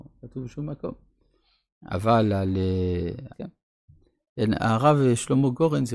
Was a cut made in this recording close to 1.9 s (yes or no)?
no